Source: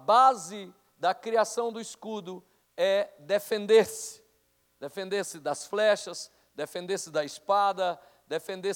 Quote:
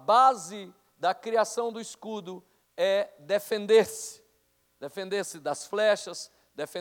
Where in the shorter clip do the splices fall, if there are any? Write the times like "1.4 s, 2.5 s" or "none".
none